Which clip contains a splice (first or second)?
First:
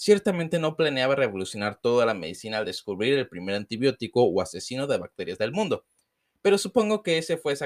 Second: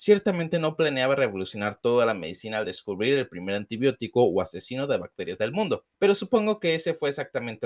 second